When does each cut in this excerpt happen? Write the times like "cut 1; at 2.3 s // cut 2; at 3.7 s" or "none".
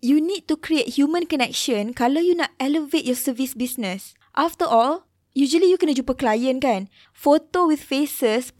cut 1; at 5.2 s // cut 2; at 7.1 s